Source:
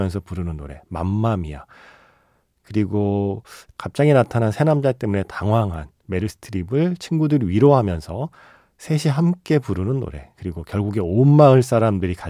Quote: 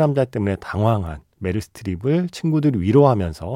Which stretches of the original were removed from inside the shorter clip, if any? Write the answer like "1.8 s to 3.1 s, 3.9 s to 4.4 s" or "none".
none